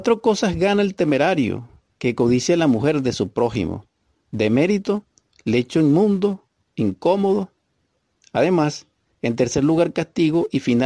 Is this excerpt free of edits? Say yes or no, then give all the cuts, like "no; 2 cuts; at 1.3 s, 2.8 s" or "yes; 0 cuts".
yes; 0 cuts